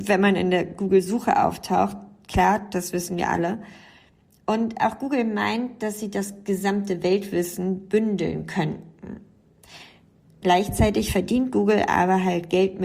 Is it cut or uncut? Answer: uncut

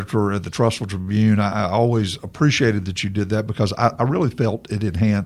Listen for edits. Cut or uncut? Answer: uncut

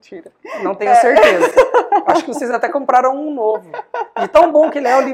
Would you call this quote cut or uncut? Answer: uncut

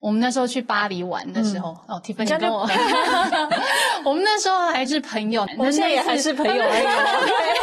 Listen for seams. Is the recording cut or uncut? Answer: cut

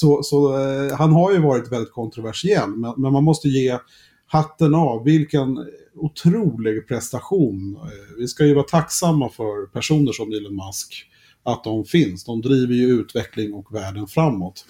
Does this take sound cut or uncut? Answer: uncut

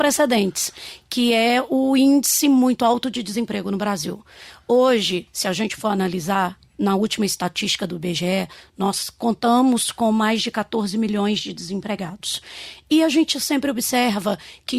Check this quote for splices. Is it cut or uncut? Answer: uncut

